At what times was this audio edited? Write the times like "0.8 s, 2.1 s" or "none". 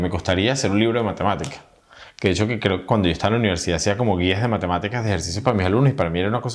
none